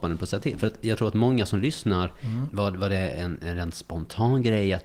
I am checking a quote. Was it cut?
yes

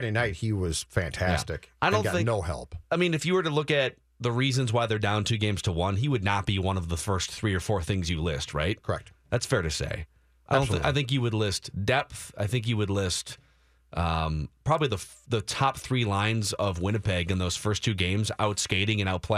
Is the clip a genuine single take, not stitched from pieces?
yes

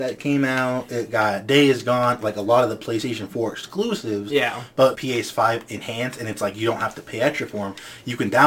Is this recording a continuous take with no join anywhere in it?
no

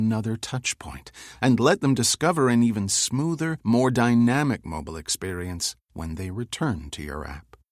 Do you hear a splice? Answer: no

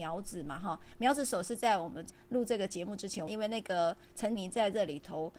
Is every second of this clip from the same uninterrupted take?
no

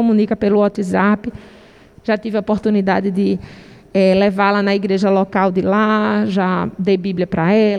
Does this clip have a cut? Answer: no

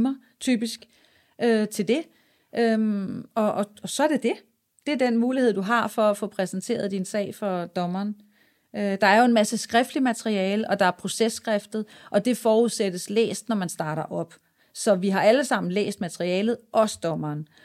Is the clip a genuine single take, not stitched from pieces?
yes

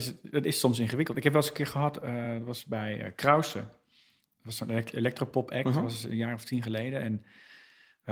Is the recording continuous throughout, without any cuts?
yes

